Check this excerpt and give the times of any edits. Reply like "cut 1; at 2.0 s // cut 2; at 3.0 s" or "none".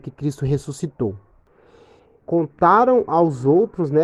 cut 1; at 2.2 s